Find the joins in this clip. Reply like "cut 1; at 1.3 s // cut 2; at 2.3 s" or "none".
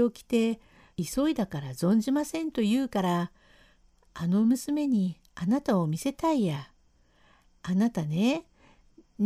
cut 1; at 0.9 s